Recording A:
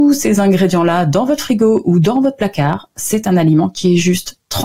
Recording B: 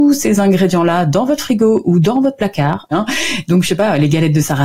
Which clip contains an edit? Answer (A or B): B